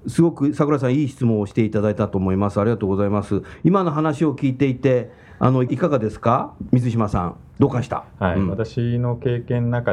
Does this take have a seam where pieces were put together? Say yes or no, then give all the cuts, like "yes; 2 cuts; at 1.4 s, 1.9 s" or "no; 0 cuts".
yes; 1 cut; at 7.6 s